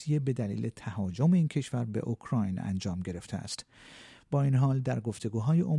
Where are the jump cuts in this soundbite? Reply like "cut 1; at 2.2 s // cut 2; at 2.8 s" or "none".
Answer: none